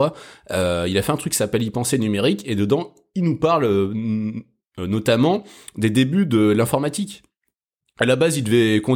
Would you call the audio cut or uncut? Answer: uncut